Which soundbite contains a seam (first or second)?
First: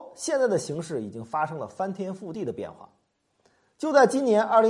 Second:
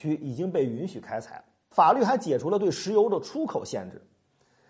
second